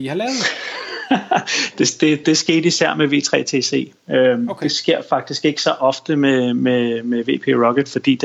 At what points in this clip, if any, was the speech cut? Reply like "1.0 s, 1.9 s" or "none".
2.2 s